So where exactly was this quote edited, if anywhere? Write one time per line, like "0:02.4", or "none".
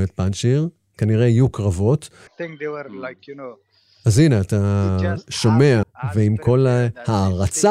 0:02.3
0:05.8